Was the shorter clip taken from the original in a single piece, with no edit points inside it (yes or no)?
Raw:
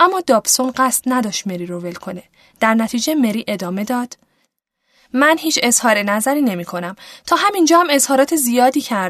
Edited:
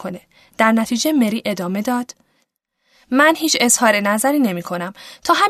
yes